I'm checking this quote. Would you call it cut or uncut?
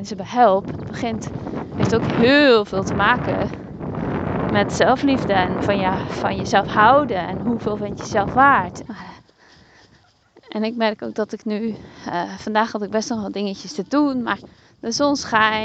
cut